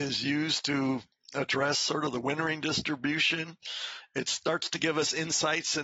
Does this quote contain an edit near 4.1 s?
no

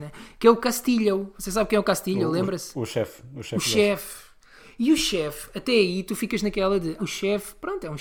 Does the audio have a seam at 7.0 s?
yes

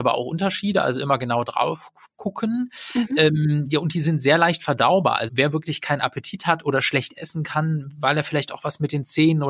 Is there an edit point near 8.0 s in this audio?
no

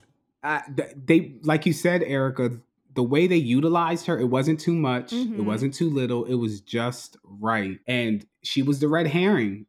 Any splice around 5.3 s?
no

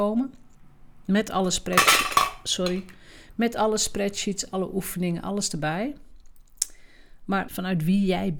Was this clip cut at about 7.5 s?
yes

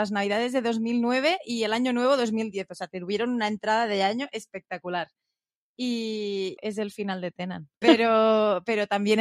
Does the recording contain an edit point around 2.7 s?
no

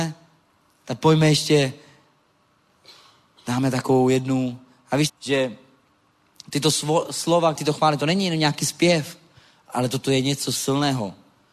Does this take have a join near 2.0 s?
no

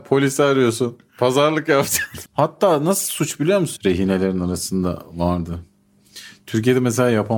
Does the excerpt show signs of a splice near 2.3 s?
yes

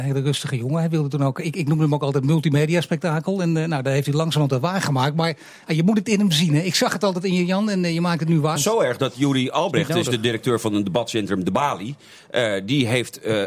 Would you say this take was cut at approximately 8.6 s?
yes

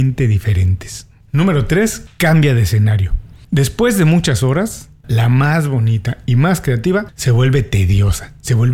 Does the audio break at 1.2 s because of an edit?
no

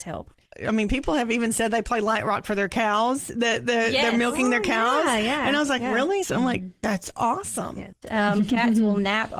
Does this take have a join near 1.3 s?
no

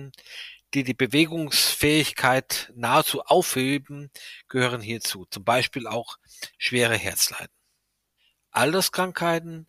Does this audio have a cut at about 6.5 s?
yes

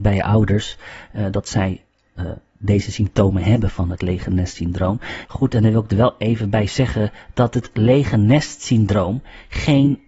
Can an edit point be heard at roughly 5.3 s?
yes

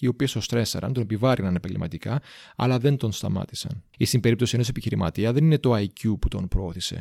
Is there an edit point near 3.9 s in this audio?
yes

